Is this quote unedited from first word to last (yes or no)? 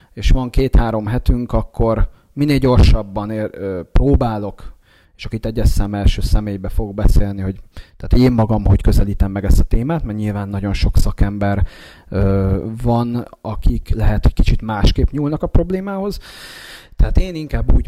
yes